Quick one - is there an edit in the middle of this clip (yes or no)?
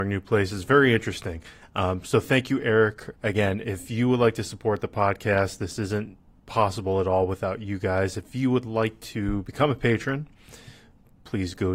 yes